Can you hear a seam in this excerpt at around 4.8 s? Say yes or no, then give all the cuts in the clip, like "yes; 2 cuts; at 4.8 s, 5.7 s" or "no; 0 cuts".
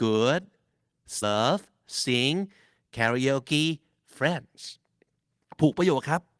no; 1 cut; at 1.2 s